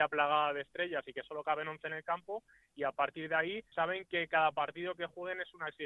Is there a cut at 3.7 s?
yes; 1 cut; at 3.7 s

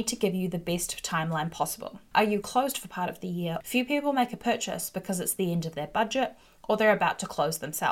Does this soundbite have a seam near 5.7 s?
no; 2 cuts; at 2.1 s, 3.6 s

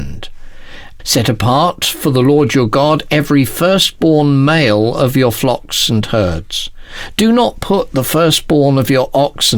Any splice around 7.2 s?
no; 1 cut; at 1.0 s

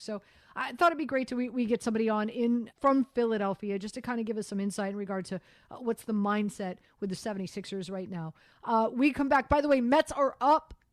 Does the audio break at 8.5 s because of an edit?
no; 1 cut; at 2.7 s

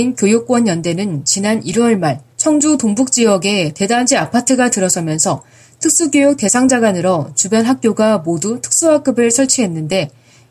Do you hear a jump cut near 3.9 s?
no; 1 cut; at 2.3 s

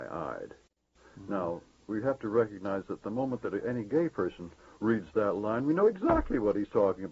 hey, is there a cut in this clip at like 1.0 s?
no; 0 cuts

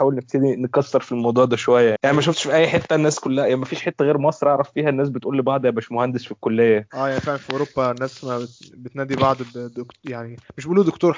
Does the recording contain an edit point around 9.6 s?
no; 1 cut; at 2.0 s

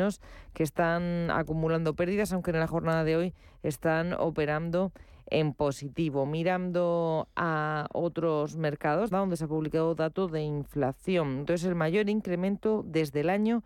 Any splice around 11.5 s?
yes; 2 cuts; at 9.1 s, 11.5 s

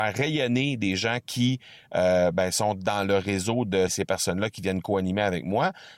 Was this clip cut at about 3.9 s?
yes; 1 cut; at 3.9 s

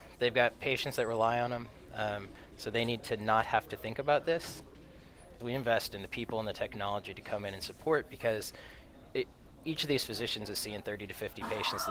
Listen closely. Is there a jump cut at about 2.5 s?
no; 1 cut; at 5.4 s

